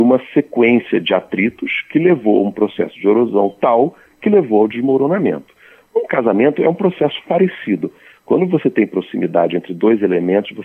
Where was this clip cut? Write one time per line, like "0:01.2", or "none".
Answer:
0:08.2